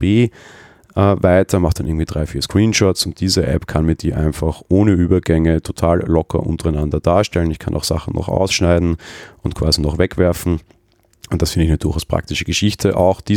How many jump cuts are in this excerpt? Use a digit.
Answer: 0